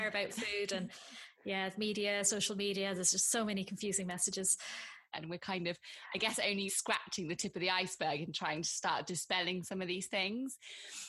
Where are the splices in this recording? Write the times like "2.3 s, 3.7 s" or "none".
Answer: 5.1 s, 6.7 s